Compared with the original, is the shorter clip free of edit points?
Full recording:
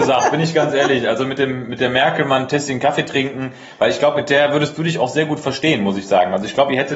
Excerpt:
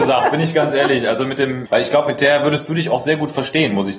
no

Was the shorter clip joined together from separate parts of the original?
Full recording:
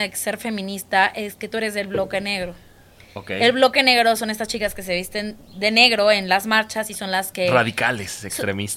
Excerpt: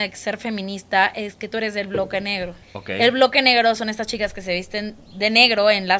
yes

